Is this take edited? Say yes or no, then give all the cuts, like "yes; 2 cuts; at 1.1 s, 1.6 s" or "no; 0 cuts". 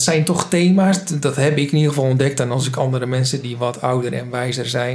no; 0 cuts